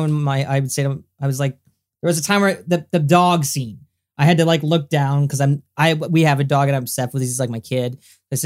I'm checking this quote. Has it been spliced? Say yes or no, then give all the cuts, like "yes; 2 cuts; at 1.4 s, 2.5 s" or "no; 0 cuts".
no; 0 cuts